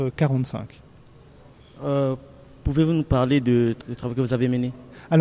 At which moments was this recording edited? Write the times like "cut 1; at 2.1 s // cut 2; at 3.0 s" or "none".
none

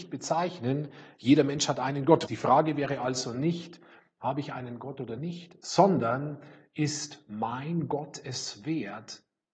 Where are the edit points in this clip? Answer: cut 1; at 2.3 s

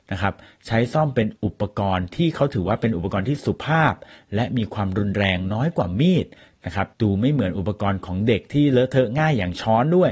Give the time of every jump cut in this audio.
cut 1; at 1.4 s // cut 2; at 6.9 s

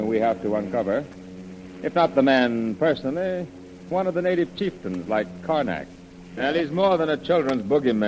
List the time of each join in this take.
cut 1; at 3.9 s // cut 2; at 6.4 s

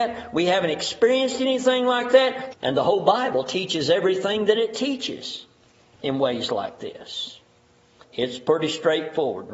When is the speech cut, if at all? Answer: cut 1; at 2.5 s // cut 2; at 8.0 s

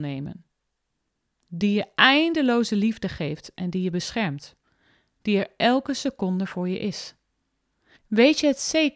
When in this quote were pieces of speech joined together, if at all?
cut 1; at 8.0 s

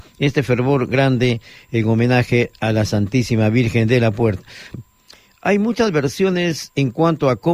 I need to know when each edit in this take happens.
cut 1; at 4.7 s

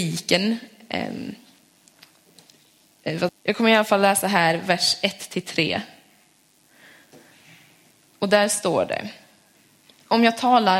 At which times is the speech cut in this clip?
cut 1; at 3.3 s

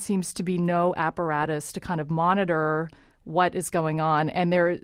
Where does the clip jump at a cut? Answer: none

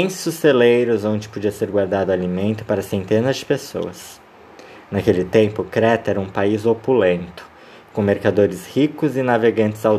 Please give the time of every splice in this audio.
none

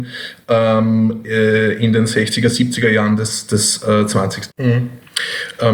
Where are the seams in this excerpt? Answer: cut 1; at 4.5 s

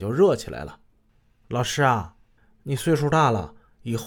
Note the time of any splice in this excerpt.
none

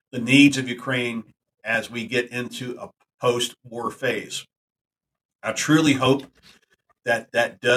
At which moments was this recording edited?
none

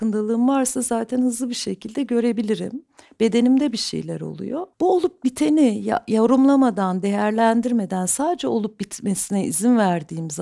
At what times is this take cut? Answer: cut 1; at 4.7 s

